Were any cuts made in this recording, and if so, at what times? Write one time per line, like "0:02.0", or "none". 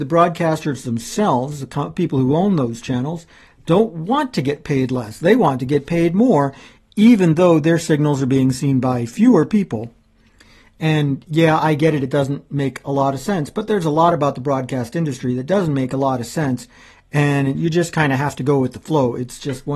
none